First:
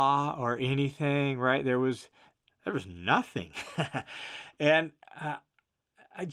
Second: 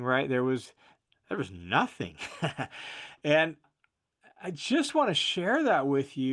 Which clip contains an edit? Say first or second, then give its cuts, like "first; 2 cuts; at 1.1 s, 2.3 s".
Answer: second; 1 cut; at 3.6 s